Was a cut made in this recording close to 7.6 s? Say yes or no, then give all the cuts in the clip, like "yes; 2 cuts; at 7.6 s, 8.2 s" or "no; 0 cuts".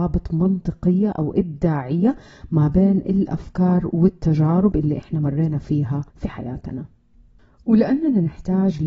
no; 1 cut; at 6.1 s